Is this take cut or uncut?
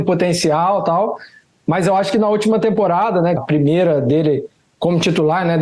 cut